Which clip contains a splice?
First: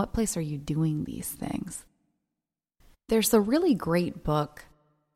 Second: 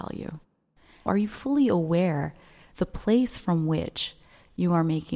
second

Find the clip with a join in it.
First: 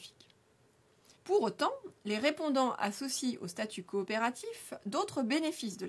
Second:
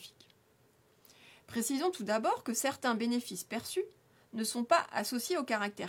first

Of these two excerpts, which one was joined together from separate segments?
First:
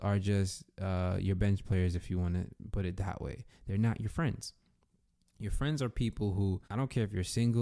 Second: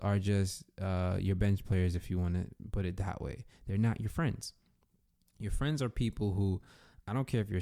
first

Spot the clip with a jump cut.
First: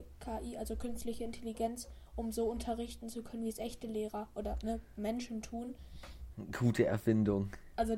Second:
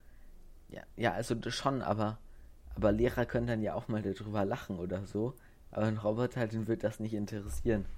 first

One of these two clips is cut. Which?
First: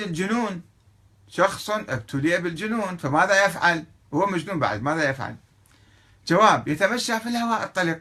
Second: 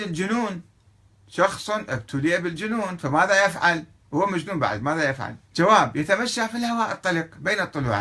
second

